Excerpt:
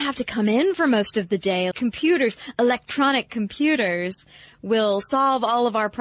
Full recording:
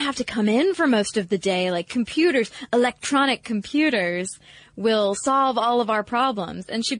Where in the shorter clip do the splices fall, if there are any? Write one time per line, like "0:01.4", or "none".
0:01.7